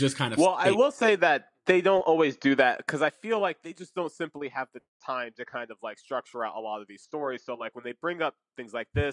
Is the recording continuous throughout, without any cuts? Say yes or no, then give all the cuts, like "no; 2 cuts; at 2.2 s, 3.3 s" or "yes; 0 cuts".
yes; 0 cuts